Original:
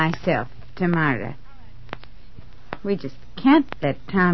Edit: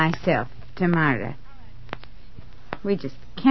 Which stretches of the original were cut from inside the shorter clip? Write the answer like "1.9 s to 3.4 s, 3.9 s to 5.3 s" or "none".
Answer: none